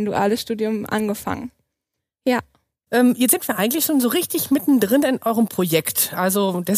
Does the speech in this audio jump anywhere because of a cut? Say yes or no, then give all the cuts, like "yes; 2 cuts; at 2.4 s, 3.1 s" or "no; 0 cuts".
yes; 1 cut; at 2.9 s